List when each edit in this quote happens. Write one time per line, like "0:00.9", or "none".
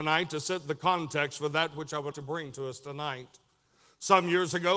0:02.1